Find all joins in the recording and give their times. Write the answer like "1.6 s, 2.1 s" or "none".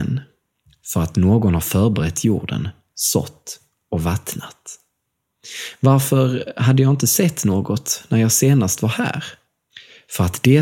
2.9 s